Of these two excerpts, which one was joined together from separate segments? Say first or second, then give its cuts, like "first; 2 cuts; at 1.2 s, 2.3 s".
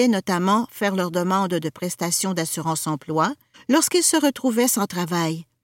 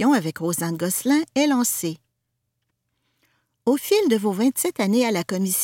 first; 1 cut; at 3.5 s